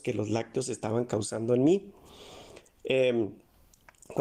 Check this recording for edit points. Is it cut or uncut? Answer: uncut